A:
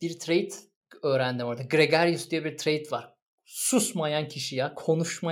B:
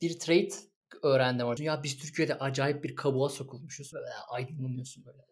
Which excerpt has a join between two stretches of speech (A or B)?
B